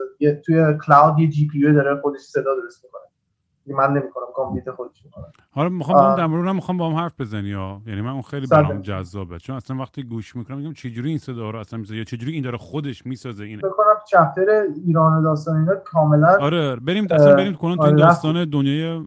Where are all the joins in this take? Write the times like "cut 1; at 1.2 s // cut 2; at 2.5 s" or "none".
cut 1; at 13.6 s